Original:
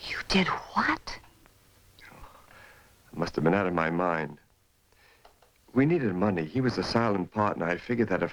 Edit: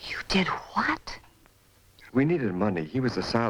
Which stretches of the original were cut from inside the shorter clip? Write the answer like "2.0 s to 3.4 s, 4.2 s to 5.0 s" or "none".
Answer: 2.1 s to 5.7 s